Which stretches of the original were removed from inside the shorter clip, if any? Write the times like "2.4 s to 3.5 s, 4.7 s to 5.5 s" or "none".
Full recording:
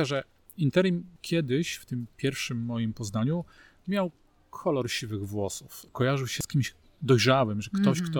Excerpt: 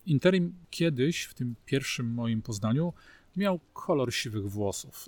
4.2 s to 4.5 s